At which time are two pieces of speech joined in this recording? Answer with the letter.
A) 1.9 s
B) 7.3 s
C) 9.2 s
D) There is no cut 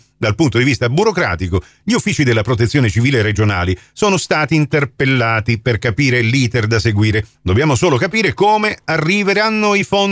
B